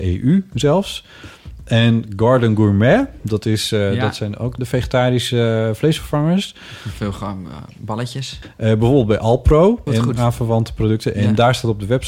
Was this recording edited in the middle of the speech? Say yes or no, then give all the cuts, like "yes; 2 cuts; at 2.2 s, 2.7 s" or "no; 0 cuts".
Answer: yes; 3 cuts; at 4.6 s, 8.4 s, 9.9 s